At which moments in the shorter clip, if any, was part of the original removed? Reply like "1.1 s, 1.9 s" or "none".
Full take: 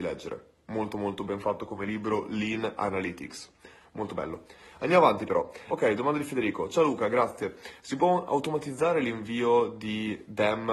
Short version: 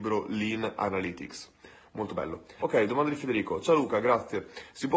2.6 s